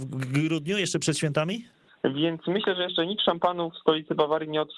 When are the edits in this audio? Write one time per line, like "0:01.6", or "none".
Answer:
0:01.9